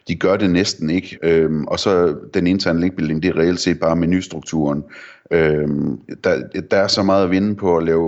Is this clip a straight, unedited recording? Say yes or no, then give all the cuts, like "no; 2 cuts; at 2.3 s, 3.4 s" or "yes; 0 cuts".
no; 1 cut; at 1.2 s